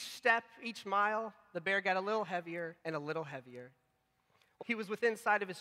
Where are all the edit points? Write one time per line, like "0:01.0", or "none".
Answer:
0:02.8
0:04.6